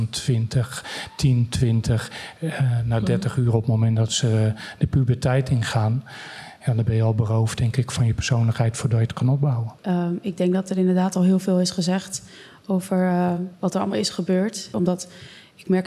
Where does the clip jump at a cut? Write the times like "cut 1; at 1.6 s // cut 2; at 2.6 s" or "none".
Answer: cut 1; at 9.8 s // cut 2; at 14.7 s